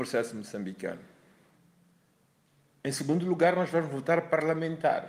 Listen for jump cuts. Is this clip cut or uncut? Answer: uncut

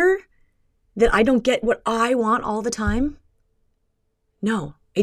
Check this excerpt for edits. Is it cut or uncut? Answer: uncut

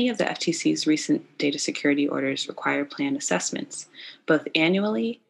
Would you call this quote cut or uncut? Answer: uncut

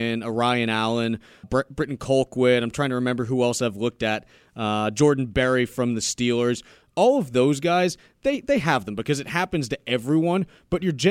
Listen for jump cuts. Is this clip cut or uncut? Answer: cut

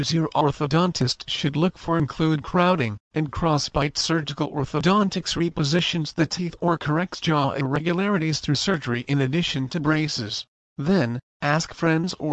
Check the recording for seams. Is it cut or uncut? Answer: cut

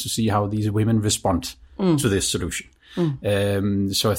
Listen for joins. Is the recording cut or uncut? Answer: uncut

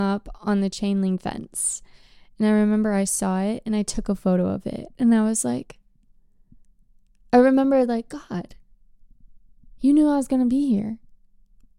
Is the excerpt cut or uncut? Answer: uncut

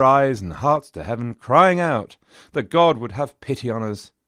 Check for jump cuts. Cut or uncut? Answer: uncut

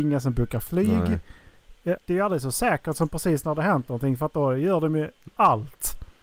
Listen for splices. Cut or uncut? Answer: cut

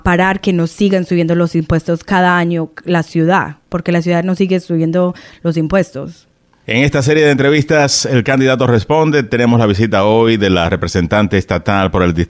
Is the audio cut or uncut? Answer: uncut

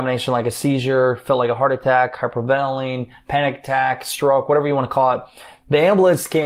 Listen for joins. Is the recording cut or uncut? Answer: uncut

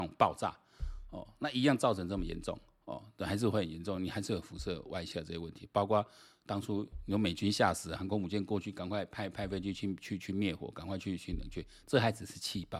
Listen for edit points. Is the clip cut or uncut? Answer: uncut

